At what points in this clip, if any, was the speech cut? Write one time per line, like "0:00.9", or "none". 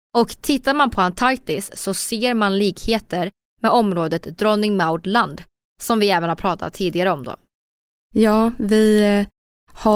none